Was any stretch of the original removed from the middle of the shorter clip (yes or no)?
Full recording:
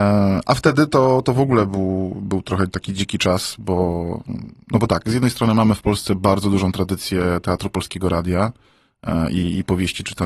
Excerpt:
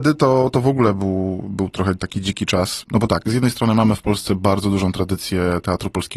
yes